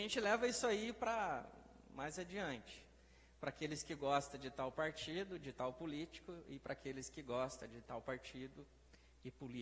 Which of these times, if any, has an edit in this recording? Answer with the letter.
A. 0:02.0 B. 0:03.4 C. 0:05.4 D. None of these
D